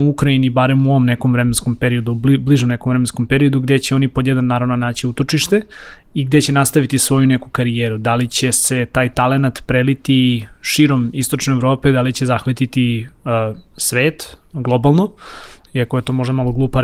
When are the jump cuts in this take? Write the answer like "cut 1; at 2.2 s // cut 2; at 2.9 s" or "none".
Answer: cut 1; at 15.7 s

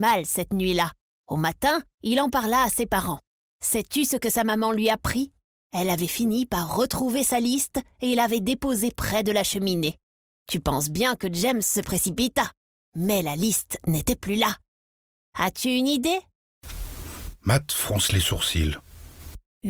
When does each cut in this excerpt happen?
cut 1; at 15.2 s

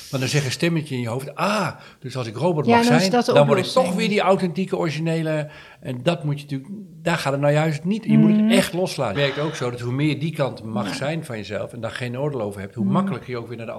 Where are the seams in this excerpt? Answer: cut 1; at 9.1 s

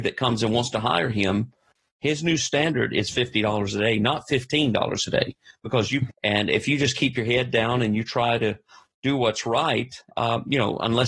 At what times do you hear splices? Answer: cut 1; at 6.1 s // cut 2; at 10.1 s

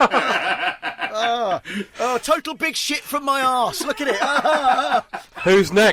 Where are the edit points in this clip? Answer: none

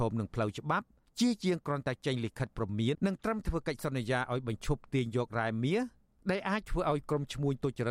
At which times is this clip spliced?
cut 1; at 2.9 s

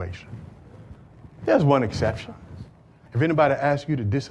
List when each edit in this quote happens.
cut 1; at 3.1 s

